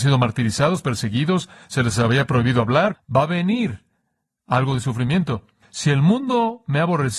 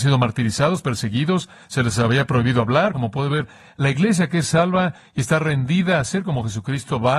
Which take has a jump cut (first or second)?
first